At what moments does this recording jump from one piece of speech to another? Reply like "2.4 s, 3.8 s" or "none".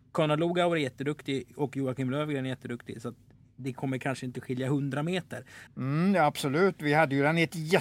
5.7 s